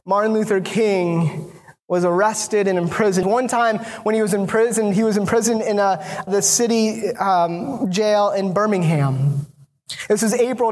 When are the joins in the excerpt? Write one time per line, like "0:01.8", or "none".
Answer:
0:03.2
0:06.3